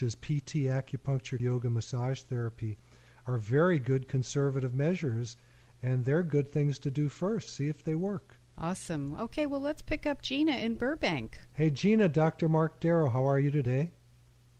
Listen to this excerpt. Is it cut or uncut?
cut